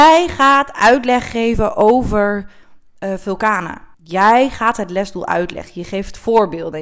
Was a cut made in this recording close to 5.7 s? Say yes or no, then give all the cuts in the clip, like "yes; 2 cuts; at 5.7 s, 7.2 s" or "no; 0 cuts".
no; 1 cut; at 3.9 s